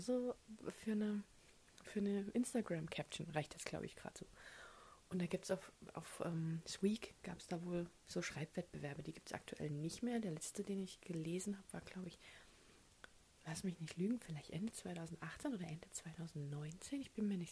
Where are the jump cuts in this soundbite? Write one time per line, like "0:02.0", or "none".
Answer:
none